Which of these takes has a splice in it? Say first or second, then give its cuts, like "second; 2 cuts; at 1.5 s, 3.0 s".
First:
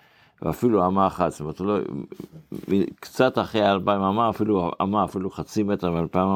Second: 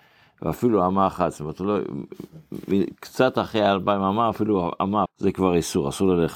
second; 1 cut; at 5.1 s